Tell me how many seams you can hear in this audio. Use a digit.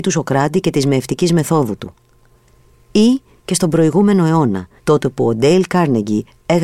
1